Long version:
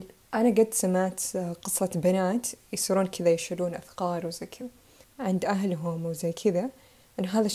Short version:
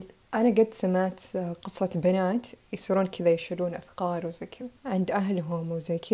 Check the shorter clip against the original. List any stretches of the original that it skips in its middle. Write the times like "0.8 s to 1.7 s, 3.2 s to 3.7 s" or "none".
4.8 s to 5.1 s